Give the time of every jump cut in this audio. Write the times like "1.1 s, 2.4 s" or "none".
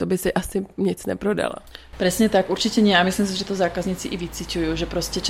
none

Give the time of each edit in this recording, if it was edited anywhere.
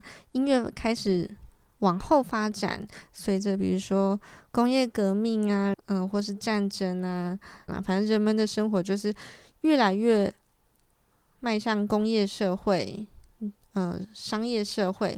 5.7 s, 7.7 s

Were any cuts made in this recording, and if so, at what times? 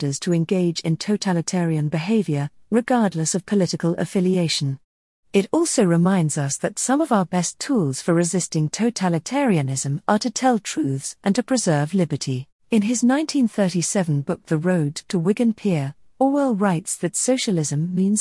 12.6 s

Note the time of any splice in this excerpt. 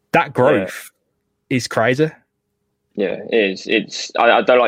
none

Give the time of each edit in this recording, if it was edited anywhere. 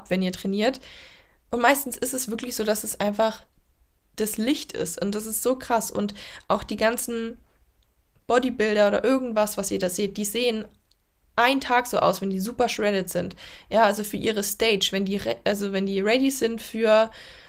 none

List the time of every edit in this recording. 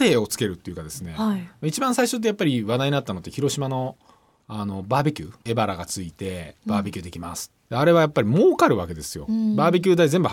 5.4 s

